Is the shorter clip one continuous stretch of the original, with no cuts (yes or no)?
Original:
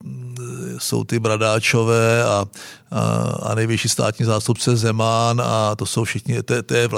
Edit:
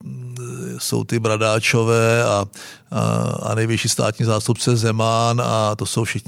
yes